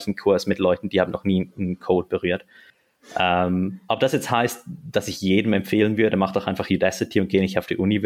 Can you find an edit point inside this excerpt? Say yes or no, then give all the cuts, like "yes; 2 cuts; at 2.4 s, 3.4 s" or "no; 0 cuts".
yes; 1 cut; at 2.7 s